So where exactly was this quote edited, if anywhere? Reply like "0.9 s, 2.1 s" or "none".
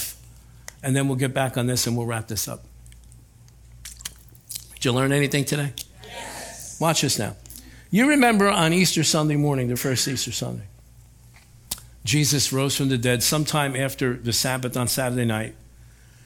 9.8 s

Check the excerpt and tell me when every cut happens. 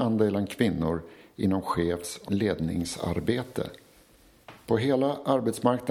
4.7 s

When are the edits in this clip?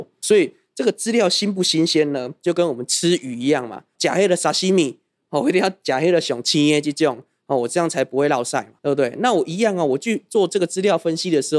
8.8 s

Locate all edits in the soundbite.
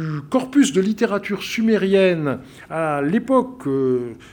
none

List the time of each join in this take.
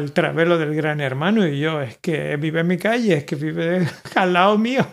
none

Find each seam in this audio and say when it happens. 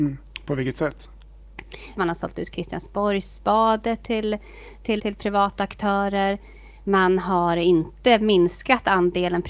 2.0 s, 5.0 s

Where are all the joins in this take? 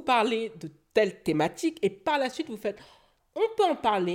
3.2 s

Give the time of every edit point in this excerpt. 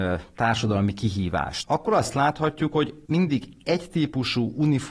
1.6 s, 3.0 s

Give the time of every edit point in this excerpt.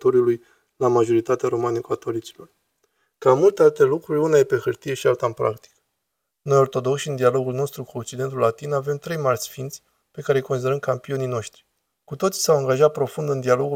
12.0 s

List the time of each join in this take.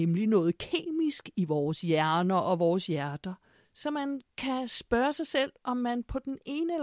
3.6 s

